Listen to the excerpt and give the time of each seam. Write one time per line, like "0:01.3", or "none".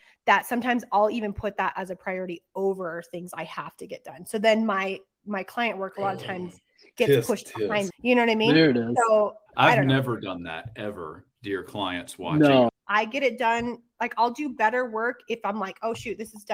0:07.9
0:09.5
0:12.7